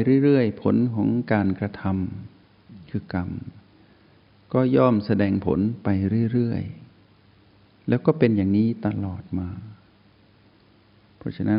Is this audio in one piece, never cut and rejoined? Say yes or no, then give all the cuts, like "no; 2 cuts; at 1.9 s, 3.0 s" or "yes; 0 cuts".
yes; 0 cuts